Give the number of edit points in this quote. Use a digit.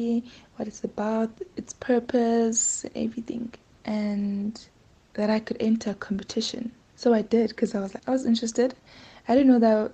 1